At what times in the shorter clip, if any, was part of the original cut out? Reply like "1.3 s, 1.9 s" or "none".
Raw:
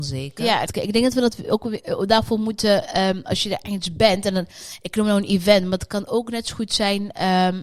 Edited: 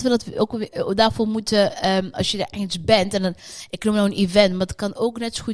none

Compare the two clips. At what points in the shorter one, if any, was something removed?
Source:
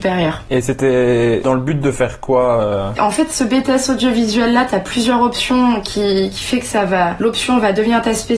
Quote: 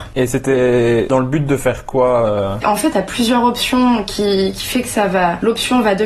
2.9 s

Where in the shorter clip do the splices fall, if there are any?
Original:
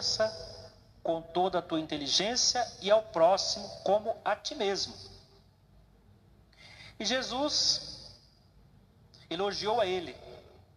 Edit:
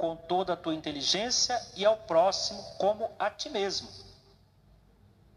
none

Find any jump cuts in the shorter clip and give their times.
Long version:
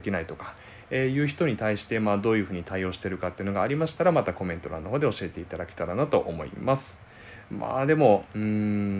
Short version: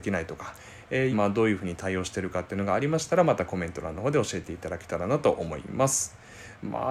1.1 s

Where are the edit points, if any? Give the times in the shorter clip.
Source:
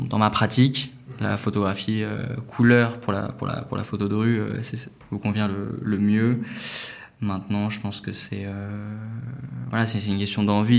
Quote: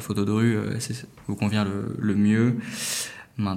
none

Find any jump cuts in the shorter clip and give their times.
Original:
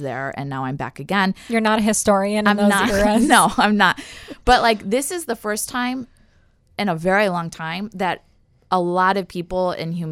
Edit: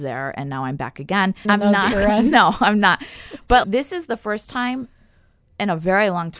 1.4 s, 3.6 s

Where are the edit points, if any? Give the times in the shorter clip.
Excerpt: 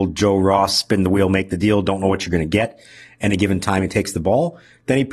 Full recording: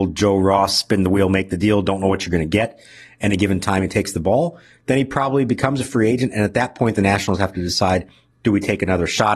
none

